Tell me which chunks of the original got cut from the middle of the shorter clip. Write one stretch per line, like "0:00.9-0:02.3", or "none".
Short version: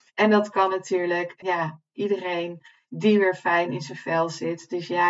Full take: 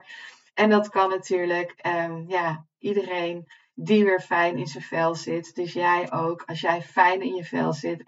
0:01.8-0:02.3